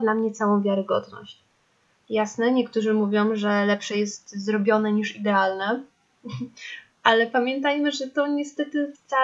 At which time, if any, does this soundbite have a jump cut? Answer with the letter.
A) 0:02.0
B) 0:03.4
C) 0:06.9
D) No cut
A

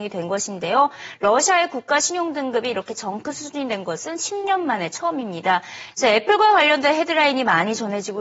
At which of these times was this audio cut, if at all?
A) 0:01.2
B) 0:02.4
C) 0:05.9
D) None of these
C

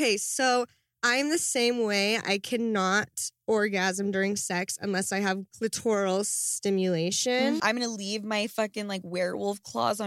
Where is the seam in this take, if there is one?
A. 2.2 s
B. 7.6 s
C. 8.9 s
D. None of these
B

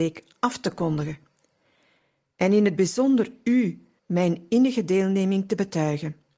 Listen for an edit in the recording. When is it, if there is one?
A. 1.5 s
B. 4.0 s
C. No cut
B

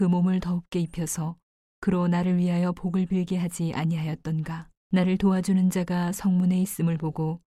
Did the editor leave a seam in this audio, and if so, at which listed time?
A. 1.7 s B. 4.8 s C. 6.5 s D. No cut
B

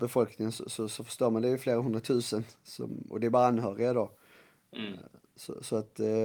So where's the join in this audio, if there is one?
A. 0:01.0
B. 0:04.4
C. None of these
C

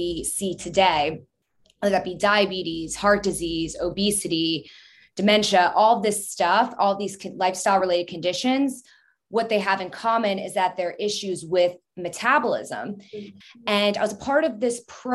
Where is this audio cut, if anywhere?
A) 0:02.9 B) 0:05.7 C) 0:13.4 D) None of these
C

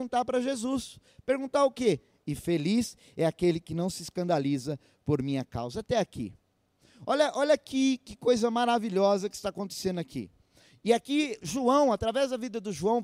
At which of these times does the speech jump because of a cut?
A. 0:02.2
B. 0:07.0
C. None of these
A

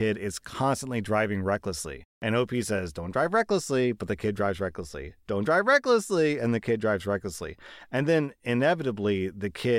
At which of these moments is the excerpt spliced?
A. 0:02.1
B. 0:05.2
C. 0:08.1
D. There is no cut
D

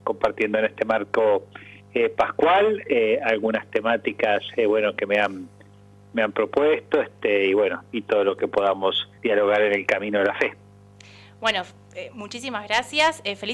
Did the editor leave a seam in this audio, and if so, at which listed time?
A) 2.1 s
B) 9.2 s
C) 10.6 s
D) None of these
B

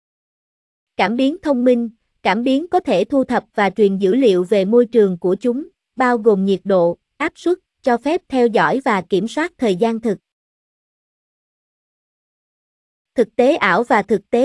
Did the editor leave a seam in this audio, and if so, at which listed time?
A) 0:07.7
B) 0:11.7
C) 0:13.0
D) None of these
A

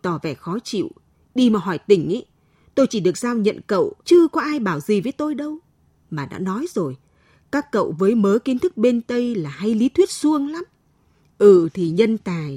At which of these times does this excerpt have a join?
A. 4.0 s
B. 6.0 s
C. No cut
A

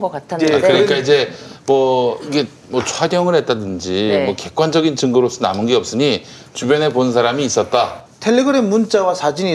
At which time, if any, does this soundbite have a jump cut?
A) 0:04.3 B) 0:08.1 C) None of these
B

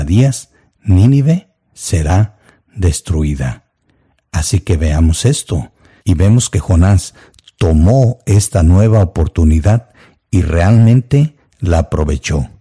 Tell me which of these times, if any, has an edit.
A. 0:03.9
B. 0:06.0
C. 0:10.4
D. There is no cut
B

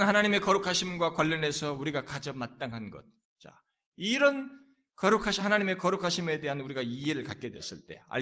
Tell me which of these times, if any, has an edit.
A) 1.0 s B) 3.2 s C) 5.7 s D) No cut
B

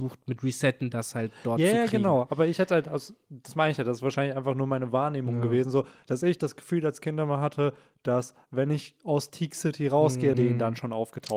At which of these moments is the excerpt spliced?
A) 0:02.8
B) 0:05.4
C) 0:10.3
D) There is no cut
C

